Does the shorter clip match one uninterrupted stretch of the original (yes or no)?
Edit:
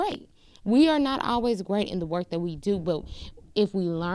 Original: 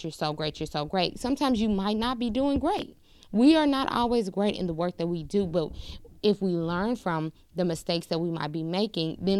yes